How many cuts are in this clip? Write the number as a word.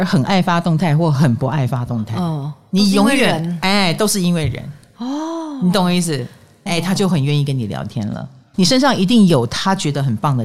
two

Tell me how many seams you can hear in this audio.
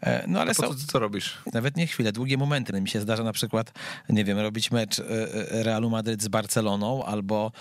two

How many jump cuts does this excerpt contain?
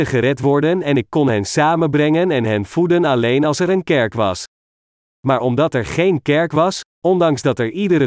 zero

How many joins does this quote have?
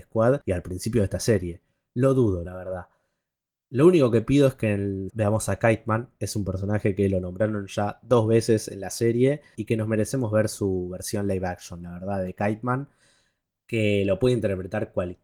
two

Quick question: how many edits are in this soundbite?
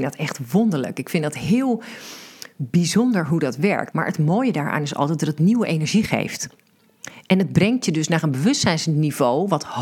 one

